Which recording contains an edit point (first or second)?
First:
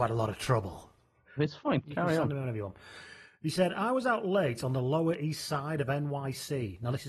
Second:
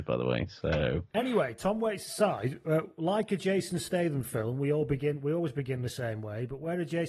first